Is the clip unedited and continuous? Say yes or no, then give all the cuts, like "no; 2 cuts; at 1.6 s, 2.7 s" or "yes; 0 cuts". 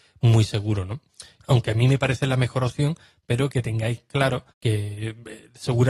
no; 2 cuts; at 1.4 s, 4.5 s